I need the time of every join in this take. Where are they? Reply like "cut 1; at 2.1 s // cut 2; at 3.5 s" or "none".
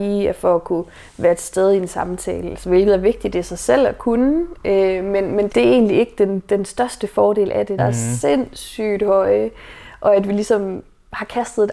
cut 1; at 5.5 s // cut 2; at 7.8 s